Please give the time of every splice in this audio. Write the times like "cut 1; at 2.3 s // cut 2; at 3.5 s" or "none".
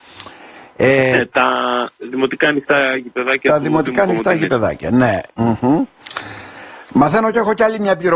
cut 1; at 5.3 s